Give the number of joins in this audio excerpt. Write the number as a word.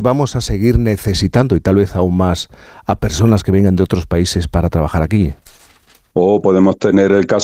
one